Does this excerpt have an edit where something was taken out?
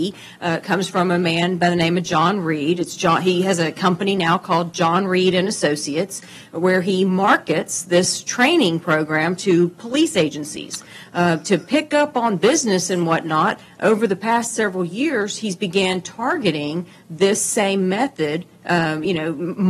no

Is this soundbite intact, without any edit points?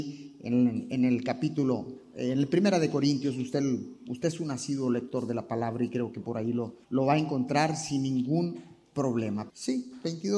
no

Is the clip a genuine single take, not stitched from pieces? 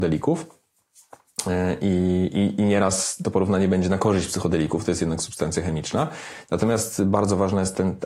yes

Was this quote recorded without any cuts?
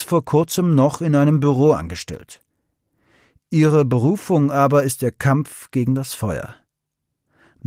yes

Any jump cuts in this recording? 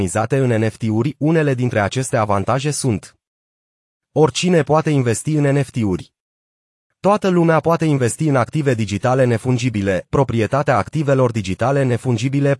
no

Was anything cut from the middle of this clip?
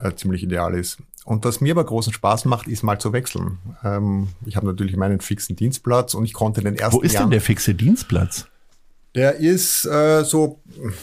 no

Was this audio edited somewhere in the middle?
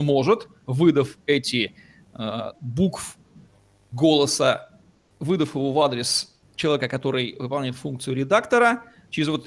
yes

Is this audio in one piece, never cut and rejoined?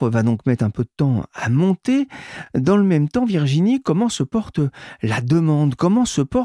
yes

